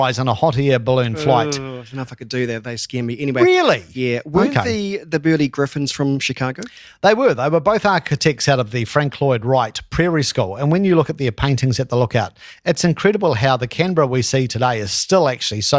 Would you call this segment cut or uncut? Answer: uncut